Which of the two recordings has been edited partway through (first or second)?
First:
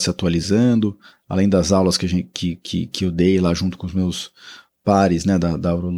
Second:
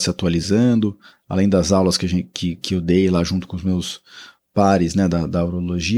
second